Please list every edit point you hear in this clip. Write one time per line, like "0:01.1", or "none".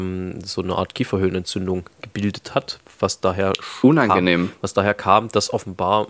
none